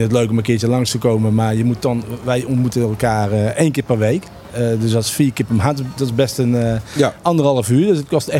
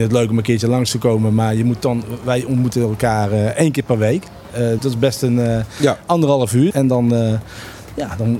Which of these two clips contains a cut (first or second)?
second